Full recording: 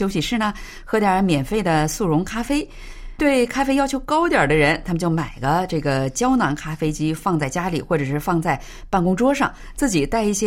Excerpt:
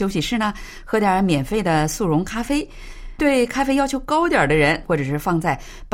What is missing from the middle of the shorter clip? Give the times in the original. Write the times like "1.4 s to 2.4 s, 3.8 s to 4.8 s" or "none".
4.8 s to 7.8 s

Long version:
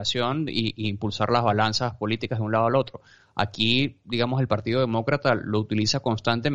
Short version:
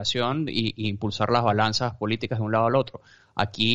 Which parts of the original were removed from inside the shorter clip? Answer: none

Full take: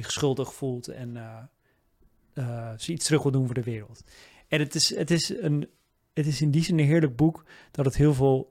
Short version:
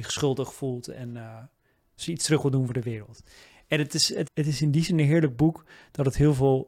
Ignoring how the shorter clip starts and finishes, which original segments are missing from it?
2.0 s to 2.8 s, 5.1 s to 6.1 s

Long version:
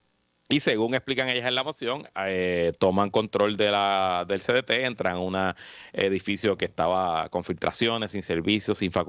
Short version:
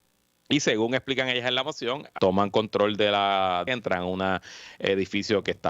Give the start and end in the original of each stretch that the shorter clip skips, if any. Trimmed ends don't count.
2.2 s to 2.8 s, 4.3 s to 4.8 s

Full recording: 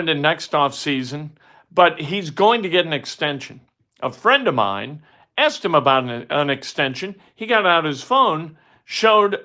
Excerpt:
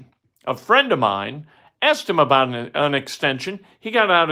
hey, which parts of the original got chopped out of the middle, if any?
none

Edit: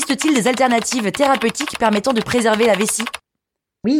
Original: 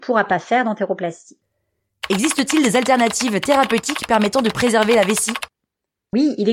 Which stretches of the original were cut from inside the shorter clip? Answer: none

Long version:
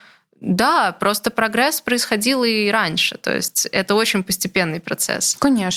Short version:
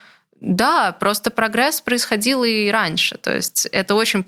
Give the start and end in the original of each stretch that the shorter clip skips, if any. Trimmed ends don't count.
none

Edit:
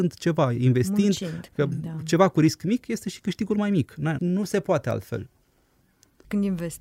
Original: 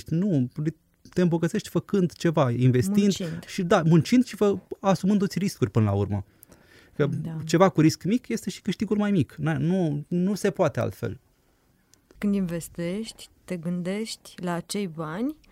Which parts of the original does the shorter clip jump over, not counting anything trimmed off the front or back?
3.5 s to 6.9 s, 9.6 s to 10.1 s

